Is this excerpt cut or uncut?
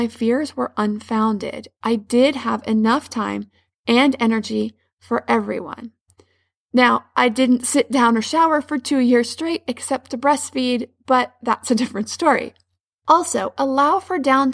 uncut